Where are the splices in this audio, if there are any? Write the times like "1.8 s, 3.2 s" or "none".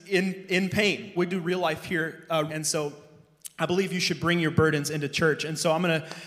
1.2 s, 2.5 s